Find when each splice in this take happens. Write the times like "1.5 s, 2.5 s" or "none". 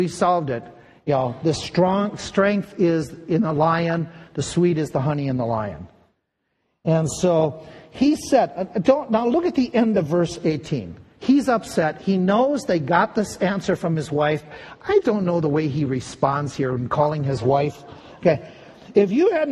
15.0 s